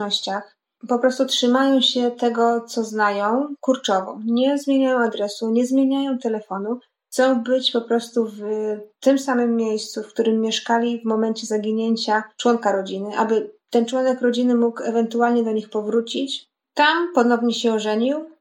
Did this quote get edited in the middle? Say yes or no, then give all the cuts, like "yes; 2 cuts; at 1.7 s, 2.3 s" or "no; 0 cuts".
yes; 1 cut; at 16.6 s